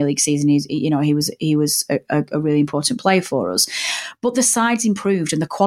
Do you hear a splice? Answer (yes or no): no